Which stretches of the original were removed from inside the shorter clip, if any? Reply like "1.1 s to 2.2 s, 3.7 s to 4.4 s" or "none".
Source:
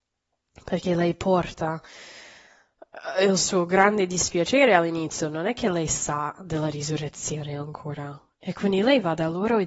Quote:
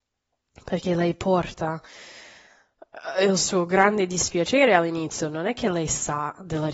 none